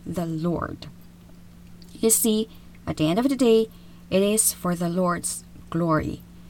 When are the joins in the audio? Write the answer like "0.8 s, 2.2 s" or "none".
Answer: none